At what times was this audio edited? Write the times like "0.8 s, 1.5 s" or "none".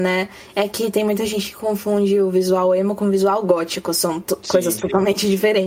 none